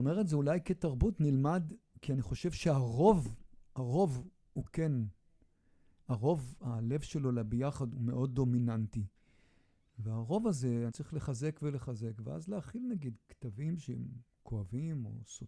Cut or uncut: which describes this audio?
cut